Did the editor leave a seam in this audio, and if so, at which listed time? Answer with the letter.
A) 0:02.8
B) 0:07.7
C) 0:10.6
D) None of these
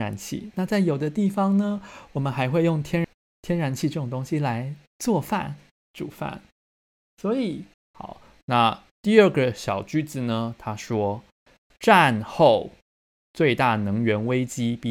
B